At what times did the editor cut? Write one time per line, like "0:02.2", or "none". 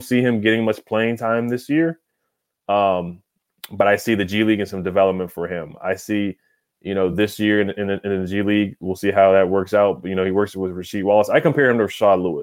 none